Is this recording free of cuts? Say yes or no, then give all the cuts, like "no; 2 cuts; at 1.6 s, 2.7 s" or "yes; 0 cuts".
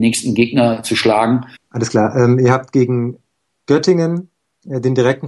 no; 1 cut; at 1.6 s